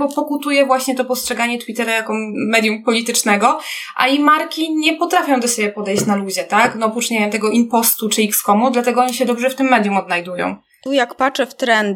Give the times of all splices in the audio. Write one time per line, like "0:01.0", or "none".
0:10.9